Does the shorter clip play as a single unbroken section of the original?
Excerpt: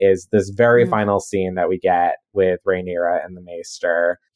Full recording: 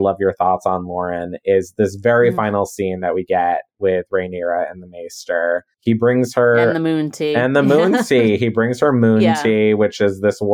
yes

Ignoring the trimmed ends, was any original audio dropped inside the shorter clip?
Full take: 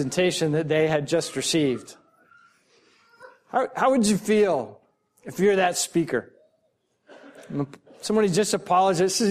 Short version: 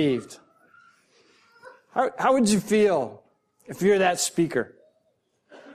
no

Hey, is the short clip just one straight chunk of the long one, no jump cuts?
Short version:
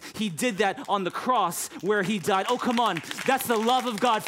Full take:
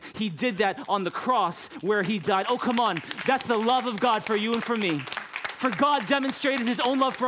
yes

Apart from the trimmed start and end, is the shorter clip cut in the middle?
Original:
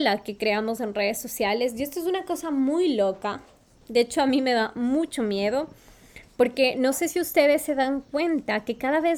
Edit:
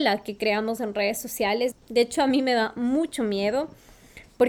yes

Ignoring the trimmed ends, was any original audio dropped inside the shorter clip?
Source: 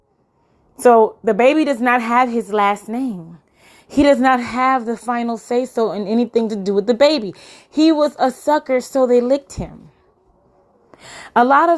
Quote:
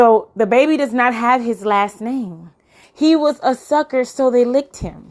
yes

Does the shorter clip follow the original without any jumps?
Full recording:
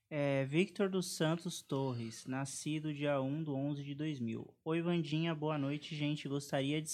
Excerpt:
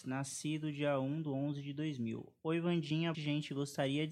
no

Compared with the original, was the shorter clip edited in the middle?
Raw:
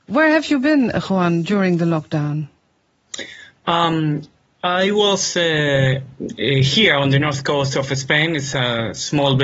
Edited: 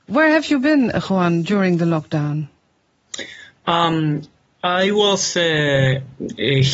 no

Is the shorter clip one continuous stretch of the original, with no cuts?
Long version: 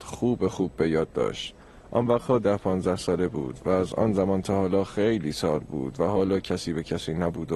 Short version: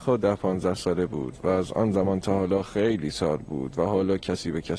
yes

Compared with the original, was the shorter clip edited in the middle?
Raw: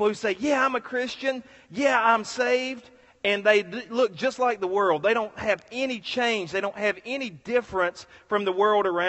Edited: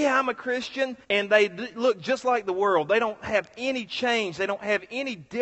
yes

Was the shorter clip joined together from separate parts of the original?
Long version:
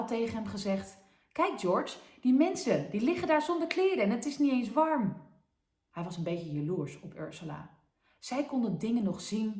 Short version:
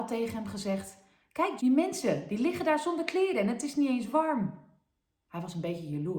yes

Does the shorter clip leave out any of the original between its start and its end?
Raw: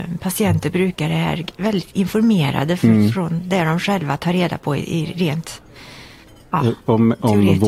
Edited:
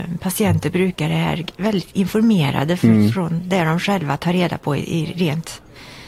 no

